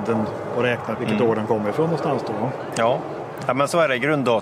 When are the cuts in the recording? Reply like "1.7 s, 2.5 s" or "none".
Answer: 0.9 s